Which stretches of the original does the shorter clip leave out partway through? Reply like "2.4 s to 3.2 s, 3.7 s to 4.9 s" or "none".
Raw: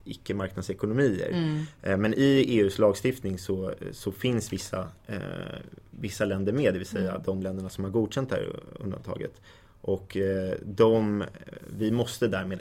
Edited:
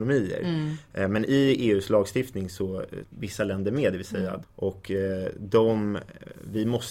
3.9 s to 5.8 s, 7.2 s to 9.7 s